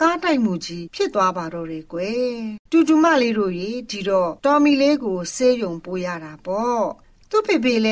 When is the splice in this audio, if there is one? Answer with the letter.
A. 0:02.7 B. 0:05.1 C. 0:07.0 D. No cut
A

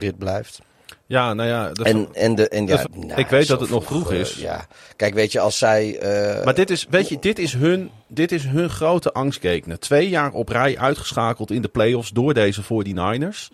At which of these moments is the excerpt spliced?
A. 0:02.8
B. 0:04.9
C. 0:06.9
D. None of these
A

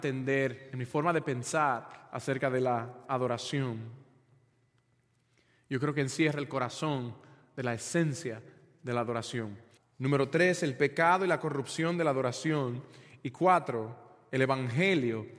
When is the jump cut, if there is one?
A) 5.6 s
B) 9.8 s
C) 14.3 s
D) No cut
B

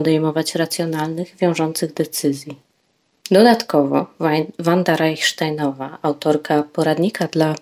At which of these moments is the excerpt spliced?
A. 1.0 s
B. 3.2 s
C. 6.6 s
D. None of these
B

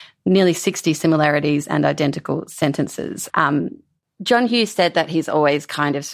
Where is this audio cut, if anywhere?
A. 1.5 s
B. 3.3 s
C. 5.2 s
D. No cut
B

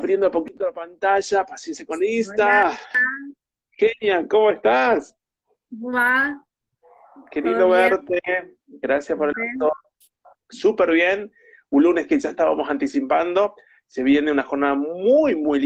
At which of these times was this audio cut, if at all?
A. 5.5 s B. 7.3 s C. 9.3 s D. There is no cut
C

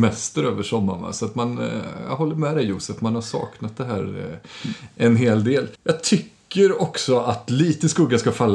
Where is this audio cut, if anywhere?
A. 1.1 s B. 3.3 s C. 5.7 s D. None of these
C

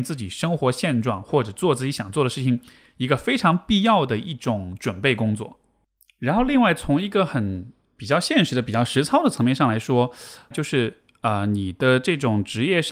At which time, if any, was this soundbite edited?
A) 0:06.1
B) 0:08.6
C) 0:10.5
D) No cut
C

